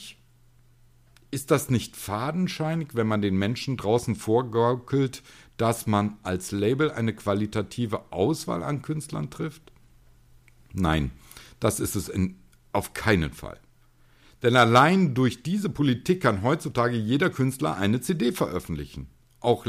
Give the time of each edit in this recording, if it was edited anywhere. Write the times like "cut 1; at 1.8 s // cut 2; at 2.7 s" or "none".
none